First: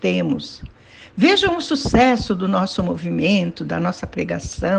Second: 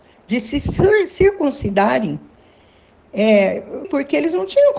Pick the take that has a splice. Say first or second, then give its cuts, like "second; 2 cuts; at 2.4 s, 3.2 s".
second; 1 cut; at 3.8 s